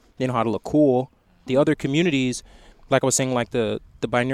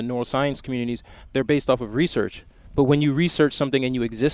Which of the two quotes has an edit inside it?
first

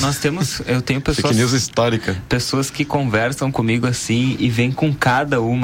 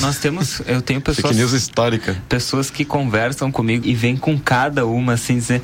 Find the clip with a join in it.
second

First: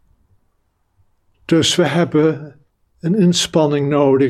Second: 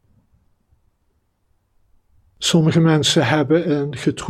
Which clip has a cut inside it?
first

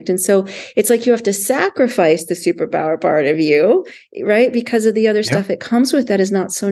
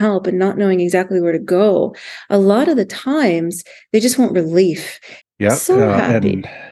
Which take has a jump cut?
second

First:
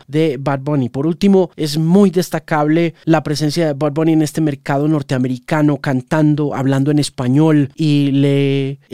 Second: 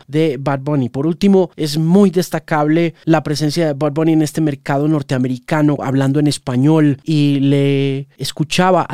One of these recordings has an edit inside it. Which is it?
second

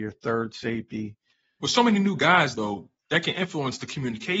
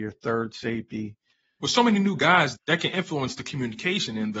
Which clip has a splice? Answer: second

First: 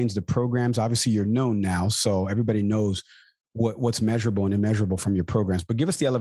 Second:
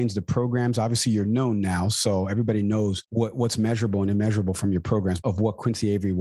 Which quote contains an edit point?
second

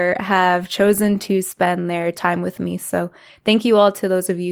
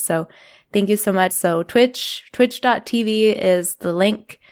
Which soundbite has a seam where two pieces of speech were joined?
second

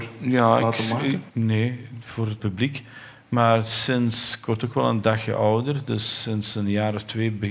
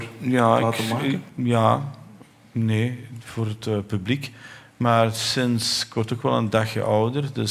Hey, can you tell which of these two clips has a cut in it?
first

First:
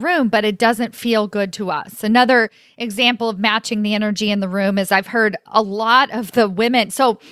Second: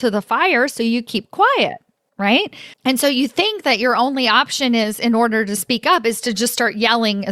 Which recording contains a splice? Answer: second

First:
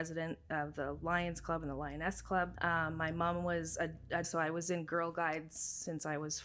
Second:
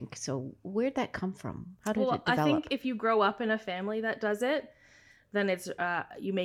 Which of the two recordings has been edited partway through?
first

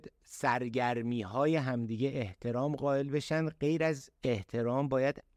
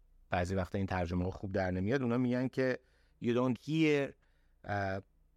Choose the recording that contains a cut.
second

